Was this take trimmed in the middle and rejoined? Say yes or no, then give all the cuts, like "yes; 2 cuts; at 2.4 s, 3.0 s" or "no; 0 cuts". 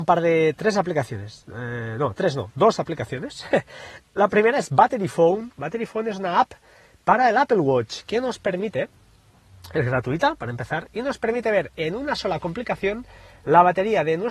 no; 0 cuts